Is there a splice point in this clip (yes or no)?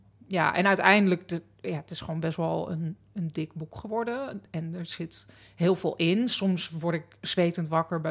no